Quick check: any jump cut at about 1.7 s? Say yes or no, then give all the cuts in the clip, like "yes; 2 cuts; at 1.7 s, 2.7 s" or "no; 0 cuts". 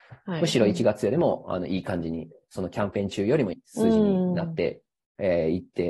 no; 1 cut; at 3.5 s